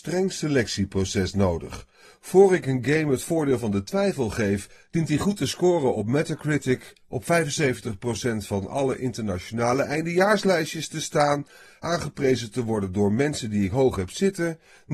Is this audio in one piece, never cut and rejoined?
yes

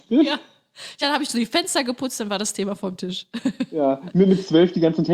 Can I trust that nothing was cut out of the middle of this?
yes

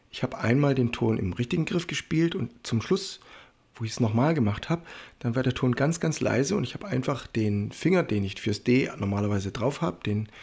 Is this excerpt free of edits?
yes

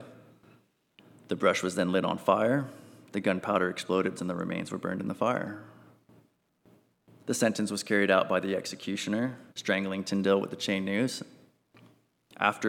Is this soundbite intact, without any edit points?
no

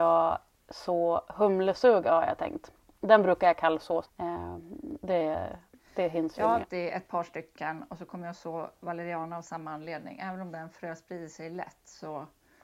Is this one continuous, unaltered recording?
no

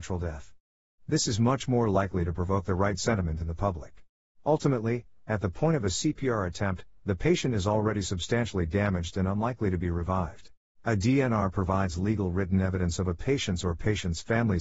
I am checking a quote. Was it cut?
yes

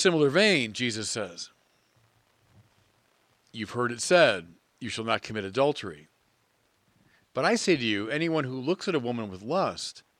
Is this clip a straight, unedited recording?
yes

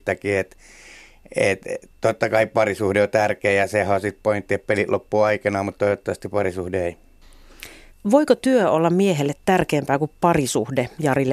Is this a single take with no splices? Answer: no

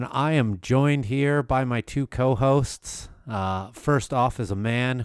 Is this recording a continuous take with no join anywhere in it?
yes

